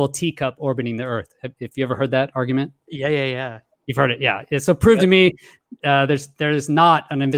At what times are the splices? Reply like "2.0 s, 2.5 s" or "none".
none